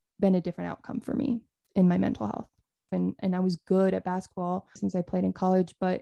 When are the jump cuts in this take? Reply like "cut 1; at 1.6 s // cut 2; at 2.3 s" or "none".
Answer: cut 1; at 2.9 s // cut 2; at 4.8 s